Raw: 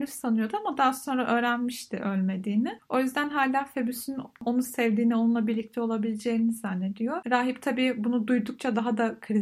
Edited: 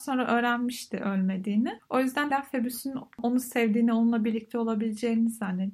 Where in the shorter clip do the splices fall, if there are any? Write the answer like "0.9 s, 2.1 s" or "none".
2.3 s